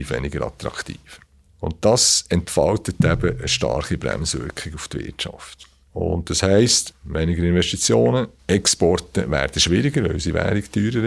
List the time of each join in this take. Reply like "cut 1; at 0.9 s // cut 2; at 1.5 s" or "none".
none